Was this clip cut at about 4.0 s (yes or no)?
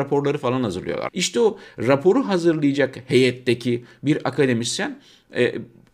no